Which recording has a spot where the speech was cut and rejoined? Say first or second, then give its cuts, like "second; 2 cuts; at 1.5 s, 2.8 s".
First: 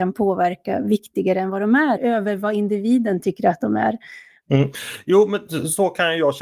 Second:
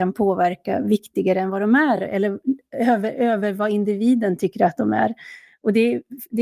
first; 2 cuts; at 2.0 s, 4.4 s